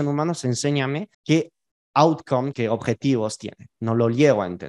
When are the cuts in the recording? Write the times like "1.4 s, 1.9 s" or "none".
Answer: 1.1 s, 2.5 s